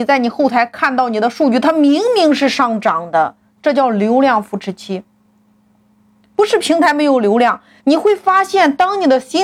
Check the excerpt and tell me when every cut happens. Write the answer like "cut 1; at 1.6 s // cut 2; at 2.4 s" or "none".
cut 1; at 7.8 s